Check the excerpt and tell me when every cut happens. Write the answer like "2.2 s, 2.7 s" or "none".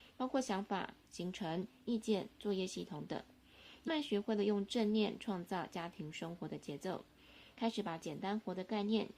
3.9 s